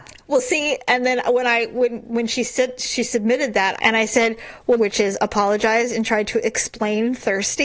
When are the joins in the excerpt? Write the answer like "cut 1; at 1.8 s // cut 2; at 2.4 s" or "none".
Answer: cut 1; at 3.8 s // cut 2; at 4.8 s